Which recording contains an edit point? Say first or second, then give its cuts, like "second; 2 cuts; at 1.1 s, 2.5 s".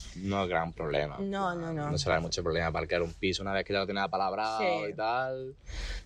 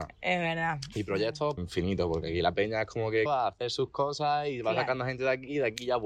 second; 2 cuts; at 1.6 s, 3.3 s